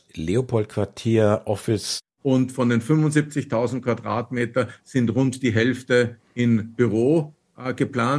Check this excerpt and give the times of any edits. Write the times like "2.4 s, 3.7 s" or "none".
2.1 s